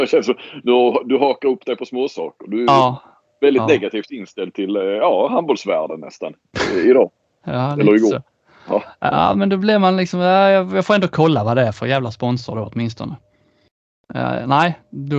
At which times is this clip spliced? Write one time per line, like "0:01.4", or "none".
none